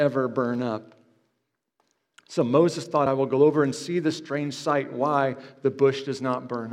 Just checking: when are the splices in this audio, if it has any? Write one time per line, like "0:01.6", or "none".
none